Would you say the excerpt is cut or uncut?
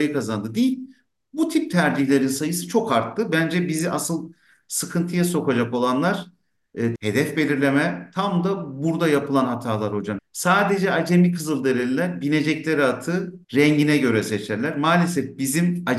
cut